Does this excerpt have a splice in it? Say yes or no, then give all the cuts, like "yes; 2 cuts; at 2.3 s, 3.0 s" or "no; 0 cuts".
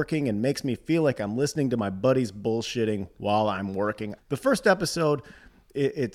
yes; 1 cut; at 4.2 s